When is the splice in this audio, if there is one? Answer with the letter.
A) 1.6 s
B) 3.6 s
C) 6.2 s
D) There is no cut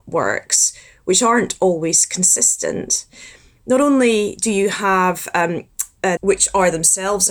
C